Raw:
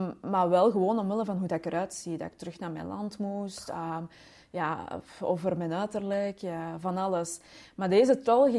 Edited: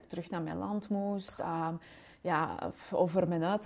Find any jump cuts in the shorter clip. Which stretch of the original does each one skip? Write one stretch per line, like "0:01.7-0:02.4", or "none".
none